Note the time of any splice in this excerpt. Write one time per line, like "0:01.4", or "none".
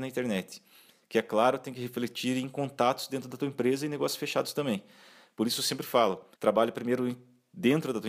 0:06.3